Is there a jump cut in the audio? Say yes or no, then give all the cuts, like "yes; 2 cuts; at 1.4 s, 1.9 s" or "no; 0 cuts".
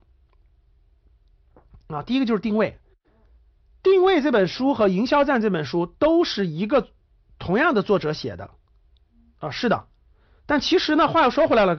yes; 1 cut; at 10.4 s